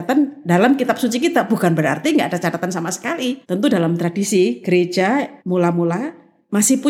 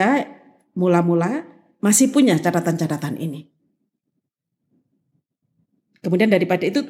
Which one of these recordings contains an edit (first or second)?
first